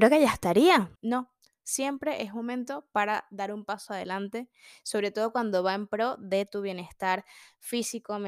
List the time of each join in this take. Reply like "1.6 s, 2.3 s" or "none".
0.9 s